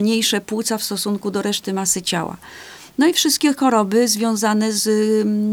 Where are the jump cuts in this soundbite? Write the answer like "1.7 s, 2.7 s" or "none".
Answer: none